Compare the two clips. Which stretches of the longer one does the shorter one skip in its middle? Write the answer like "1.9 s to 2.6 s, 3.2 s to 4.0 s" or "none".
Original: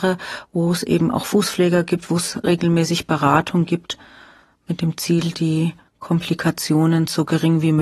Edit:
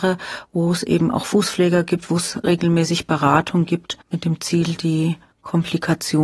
4.0 s to 4.6 s